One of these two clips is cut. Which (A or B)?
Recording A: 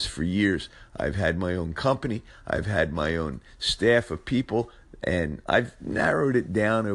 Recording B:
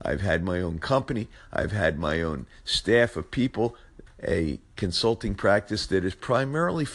B